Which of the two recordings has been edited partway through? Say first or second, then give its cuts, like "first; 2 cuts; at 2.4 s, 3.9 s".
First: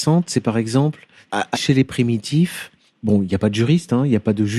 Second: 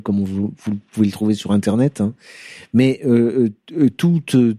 first; 2 cuts; at 1.5 s, 2.9 s